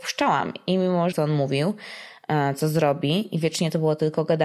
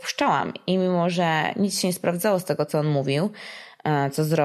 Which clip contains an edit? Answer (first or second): first